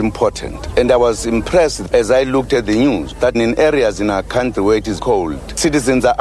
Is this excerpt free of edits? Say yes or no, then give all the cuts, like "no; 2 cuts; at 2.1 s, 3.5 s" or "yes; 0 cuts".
no; 2 cuts; at 3.3 s, 5.0 s